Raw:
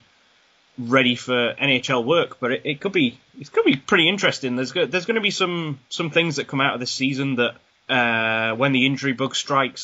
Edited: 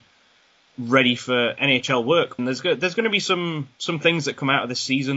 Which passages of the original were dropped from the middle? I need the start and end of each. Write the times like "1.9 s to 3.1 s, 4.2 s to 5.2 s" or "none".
2.4 s to 4.5 s